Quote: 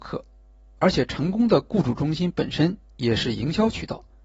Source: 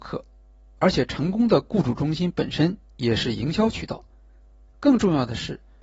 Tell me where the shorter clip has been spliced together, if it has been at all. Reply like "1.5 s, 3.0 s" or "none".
none